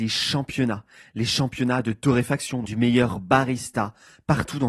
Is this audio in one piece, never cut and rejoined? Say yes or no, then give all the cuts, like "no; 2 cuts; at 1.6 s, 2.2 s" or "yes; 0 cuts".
no; 1 cut; at 2.6 s